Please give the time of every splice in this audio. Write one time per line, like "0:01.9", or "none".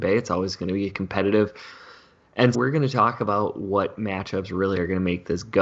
0:02.5